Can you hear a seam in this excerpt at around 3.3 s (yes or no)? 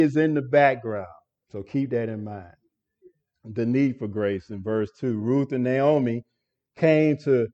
no